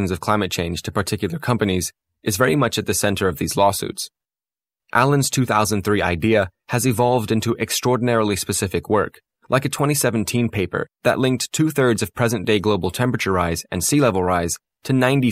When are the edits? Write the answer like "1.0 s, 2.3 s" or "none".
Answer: none